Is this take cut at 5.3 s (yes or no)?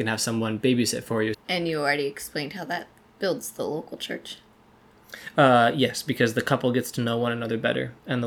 no